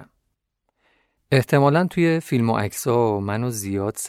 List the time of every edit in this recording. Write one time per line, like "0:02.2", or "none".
0:01.2